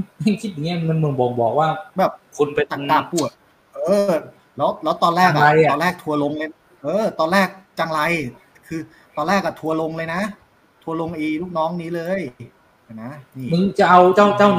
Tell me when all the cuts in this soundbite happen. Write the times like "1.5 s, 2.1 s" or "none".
none